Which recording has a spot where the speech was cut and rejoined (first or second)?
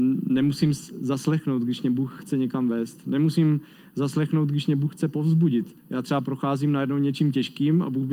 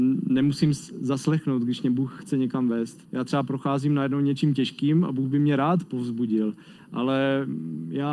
second